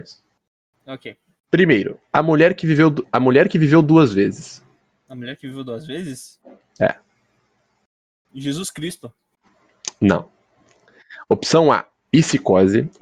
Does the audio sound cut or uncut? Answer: uncut